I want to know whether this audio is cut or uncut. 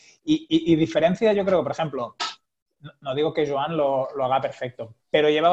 uncut